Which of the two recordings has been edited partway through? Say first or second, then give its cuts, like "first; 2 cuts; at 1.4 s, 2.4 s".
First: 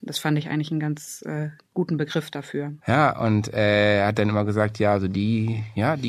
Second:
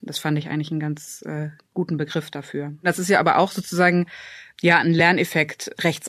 first; 1 cut; at 2.8 s